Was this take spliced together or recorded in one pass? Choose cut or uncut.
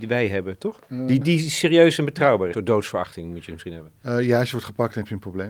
cut